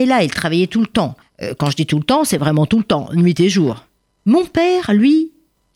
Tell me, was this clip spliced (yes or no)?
no